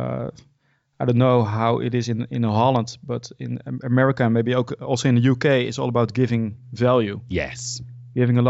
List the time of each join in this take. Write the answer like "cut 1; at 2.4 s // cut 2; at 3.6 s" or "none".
none